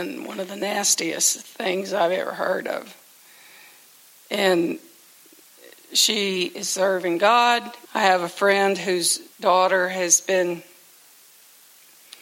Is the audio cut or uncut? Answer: cut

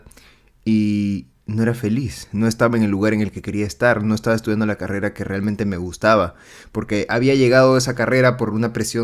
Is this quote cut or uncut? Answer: uncut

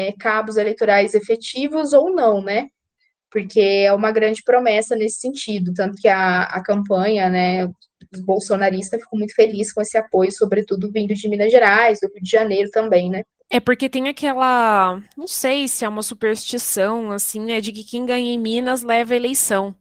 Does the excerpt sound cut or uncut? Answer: uncut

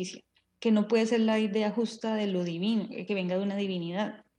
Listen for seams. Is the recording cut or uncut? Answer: uncut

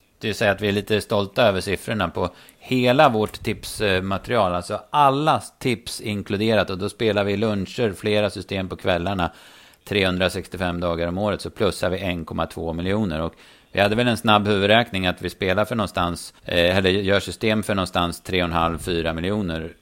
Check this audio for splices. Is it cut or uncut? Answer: cut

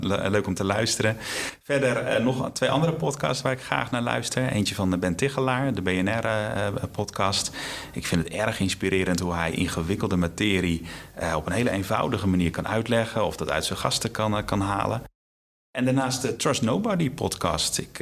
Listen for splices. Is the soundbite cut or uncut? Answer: uncut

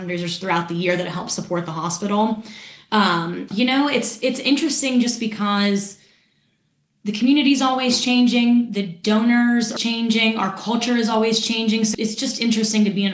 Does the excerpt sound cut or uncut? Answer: cut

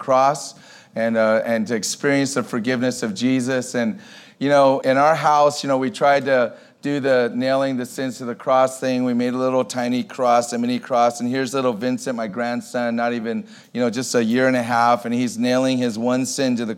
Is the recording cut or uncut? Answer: uncut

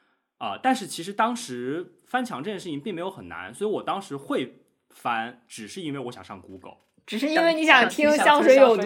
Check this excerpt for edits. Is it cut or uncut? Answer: uncut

